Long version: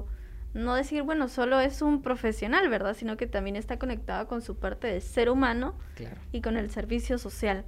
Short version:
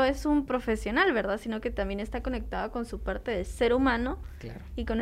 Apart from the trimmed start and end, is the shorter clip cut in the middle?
no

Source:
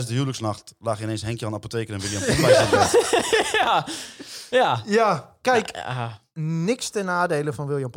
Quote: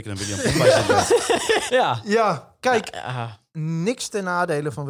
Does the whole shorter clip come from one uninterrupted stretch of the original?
no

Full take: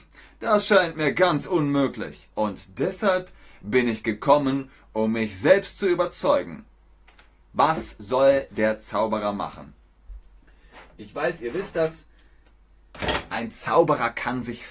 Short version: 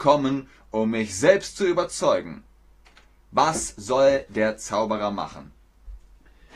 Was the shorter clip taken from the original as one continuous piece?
yes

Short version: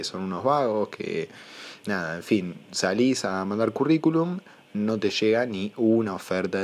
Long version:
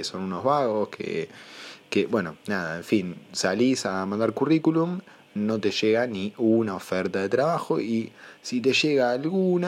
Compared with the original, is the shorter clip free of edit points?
no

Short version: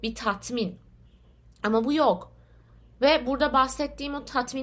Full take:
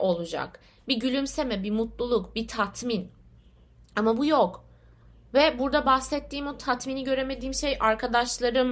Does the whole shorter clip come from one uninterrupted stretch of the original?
yes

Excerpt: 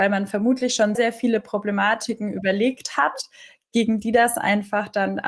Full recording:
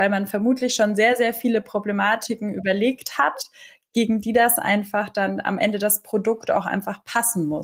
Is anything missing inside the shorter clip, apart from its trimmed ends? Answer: yes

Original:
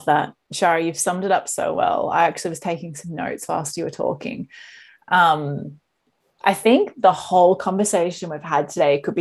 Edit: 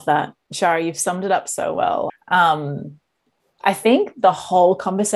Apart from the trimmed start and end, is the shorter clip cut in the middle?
yes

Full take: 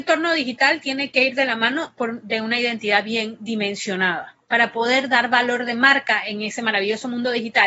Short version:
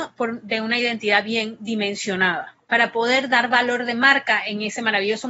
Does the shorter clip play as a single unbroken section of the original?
yes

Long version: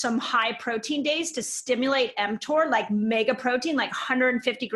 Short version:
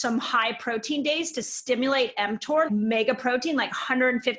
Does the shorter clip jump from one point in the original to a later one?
yes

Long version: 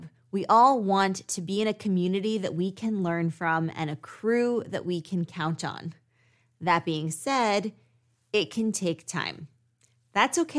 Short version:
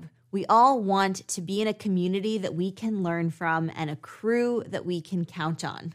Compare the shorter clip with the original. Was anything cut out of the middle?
no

